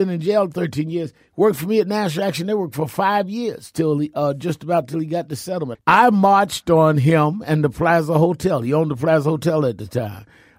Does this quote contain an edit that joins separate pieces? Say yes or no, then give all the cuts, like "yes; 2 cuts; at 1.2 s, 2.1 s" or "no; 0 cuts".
yes; 1 cut; at 5.7 s